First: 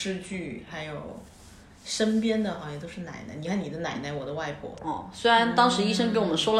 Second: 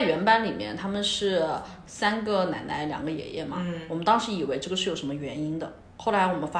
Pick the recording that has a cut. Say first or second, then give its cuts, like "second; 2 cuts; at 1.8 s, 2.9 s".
first; 1 cut; at 4.7 s